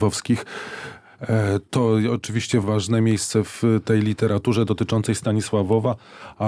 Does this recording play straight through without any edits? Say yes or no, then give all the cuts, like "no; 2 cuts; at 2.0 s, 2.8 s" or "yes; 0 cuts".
no; 1 cut; at 2.6 s